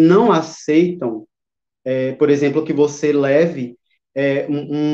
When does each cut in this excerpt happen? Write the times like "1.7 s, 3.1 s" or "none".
none